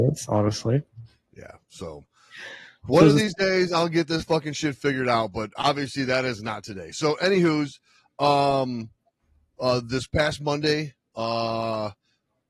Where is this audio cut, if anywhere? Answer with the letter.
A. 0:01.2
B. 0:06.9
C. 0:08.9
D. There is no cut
D